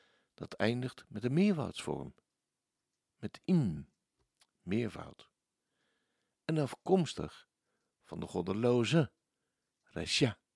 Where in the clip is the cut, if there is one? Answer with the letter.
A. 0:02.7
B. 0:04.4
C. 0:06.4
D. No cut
B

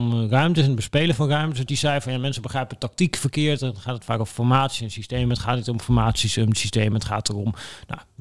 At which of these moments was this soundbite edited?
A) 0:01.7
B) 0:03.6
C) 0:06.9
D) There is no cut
A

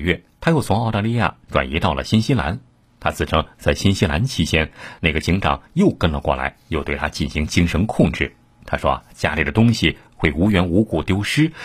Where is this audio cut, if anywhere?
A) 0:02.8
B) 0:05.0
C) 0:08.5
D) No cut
D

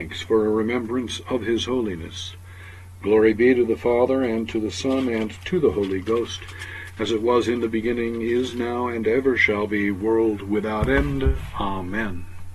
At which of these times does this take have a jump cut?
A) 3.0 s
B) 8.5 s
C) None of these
C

